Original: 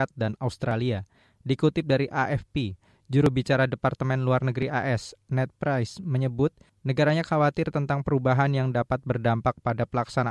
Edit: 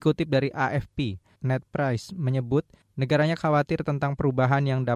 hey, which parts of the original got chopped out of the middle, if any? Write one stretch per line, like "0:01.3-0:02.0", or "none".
0:02.9-0:05.2